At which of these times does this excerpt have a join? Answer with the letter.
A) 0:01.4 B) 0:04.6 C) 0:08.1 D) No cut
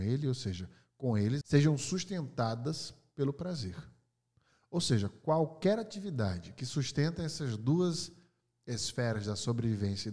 A